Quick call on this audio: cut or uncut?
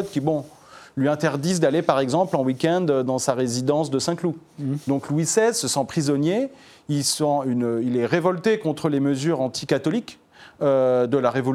uncut